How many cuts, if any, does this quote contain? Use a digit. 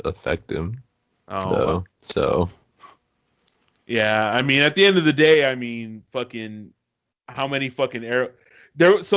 0